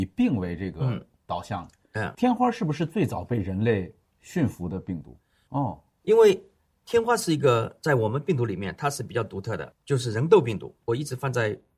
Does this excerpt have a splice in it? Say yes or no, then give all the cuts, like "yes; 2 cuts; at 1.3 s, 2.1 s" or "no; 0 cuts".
yes; 3 cuts; at 2.1 s, 5.5 s, 10.8 s